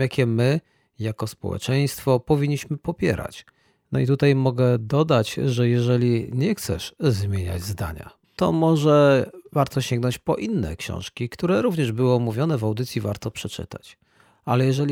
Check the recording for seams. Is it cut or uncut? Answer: cut